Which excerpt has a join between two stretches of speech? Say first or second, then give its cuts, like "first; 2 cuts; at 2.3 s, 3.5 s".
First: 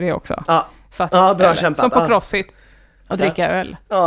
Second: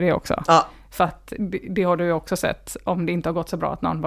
first; 2 cuts; at 1.1 s, 3.1 s